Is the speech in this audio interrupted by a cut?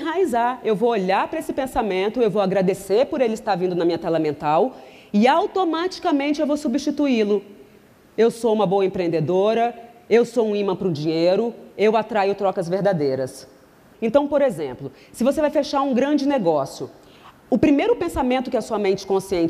yes; 1 cut; at 13.9 s

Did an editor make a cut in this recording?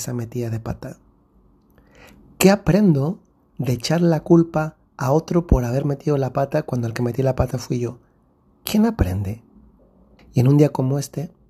yes; 1 cut; at 10.2 s

